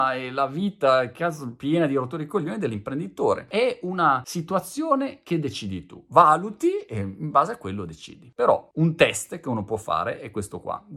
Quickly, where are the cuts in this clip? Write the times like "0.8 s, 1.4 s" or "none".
none